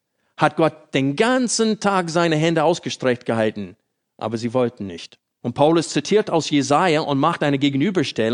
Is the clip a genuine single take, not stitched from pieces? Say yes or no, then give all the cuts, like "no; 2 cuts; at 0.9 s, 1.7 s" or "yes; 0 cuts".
no; 1 cut; at 5.4 s